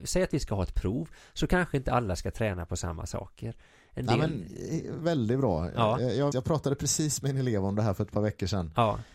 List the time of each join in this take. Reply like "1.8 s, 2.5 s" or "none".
6.3 s